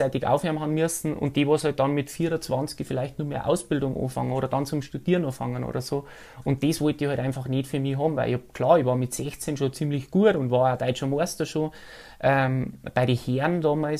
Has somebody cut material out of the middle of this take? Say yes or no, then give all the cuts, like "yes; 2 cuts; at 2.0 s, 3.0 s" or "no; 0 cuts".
no; 0 cuts